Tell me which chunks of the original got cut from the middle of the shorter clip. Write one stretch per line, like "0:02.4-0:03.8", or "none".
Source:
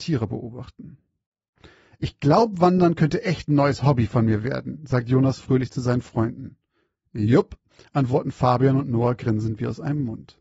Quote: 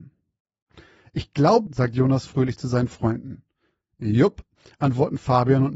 0:02.5-0:04.8